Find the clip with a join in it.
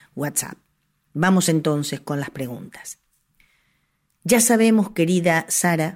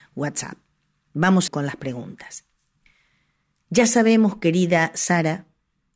second; 1 cut; at 1.5 s

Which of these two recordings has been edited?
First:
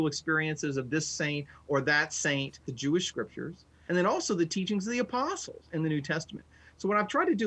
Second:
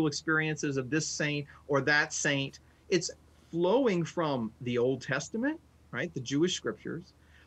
first; 2 cuts; at 2.6 s, 3.9 s

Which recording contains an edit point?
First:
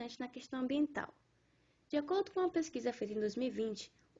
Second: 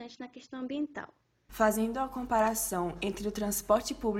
second; 1 cut; at 1.5 s

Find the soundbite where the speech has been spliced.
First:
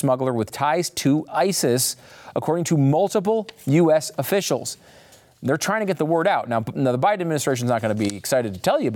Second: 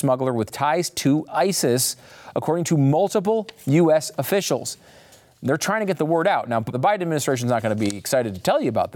second; 1 cut; at 6.7 s

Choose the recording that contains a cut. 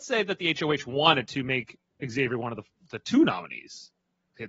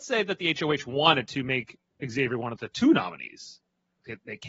second; 1 cut; at 2.6 s

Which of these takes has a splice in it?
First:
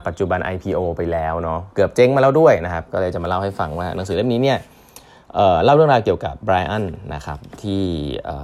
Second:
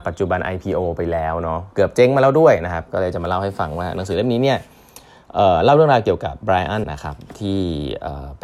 second; 1 cut; at 6.8 s

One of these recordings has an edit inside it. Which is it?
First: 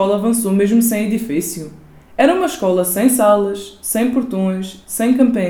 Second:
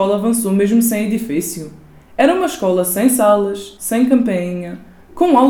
second; 1 cut; at 3.8 s

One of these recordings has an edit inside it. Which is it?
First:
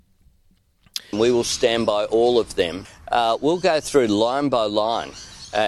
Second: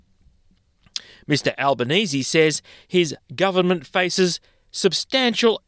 first; 1 cut; at 1.1 s

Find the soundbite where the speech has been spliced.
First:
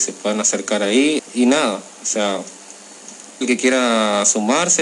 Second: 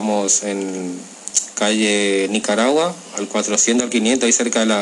first; 2 cuts; at 1.2 s, 3.4 s

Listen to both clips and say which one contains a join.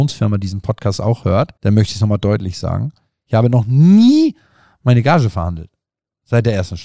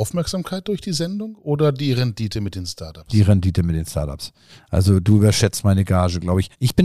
first; 1 cut; at 1.6 s

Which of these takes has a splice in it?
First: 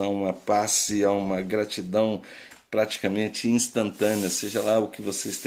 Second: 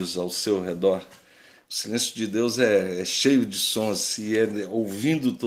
second; 1 cut; at 1.6 s

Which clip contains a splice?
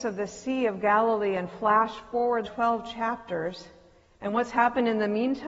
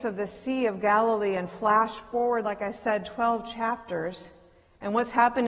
first; 1 cut; at 2.4 s

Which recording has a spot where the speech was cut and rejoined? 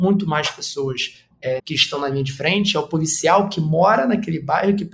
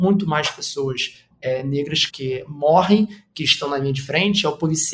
first; 1 cut; at 1.6 s

